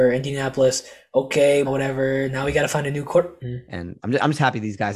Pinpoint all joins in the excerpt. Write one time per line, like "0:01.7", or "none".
0:01.6
0:03.4